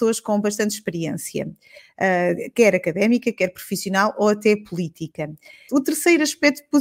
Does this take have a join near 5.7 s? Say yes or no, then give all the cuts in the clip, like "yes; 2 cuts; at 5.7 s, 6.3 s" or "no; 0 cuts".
yes; 1 cut; at 5.7 s